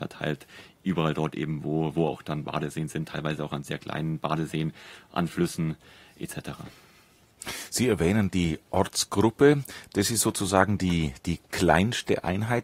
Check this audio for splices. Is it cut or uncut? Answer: uncut